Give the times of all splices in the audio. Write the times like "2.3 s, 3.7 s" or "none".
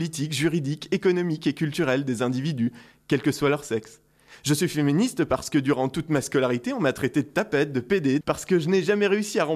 8.2 s

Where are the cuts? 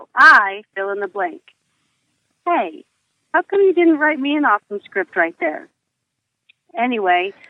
none

